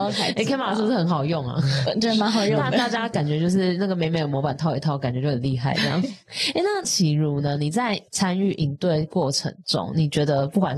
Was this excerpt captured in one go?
yes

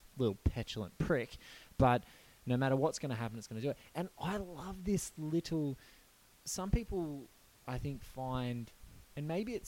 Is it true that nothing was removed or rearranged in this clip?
yes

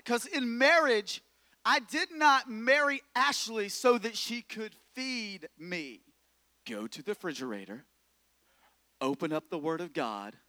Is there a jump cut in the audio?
yes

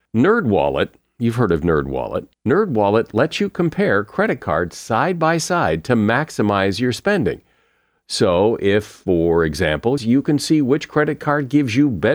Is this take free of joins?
no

